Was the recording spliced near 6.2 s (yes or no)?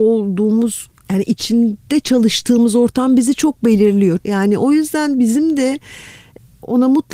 no